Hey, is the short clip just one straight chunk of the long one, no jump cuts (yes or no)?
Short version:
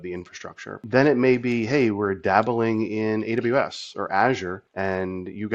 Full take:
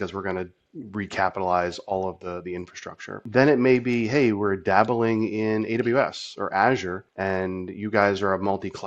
yes